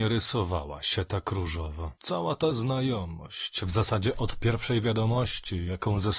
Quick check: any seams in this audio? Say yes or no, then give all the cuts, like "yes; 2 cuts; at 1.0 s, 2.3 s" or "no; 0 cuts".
yes; 1 cut; at 2.0 s